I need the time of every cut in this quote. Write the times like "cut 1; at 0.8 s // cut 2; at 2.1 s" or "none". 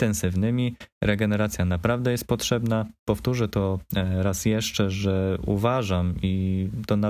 none